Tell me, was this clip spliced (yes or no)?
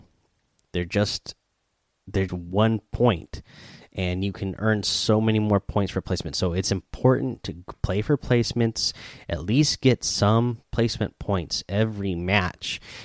yes